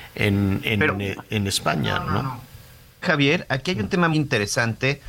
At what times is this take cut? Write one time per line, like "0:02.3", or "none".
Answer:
0:03.0
0:04.1